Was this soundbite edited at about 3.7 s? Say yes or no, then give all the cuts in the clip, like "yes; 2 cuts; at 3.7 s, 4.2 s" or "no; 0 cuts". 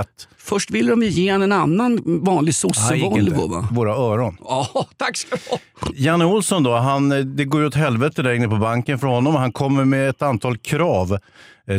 yes; 1 cut; at 3.7 s